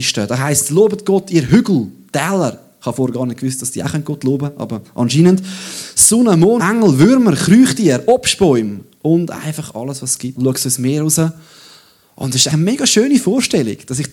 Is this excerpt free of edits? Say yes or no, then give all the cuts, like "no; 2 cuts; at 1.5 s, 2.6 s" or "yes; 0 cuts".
no; 3 cuts; at 6.6 s, 10.4 s, 12.5 s